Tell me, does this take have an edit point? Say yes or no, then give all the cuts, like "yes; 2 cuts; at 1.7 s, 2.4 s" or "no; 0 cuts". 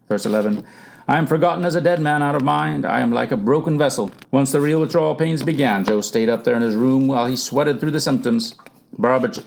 yes; 1 cut; at 4.2 s